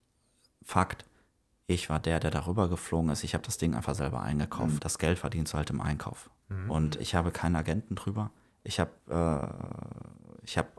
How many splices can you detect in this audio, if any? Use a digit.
2